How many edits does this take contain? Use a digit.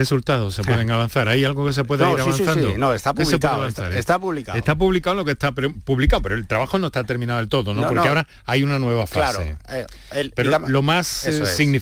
0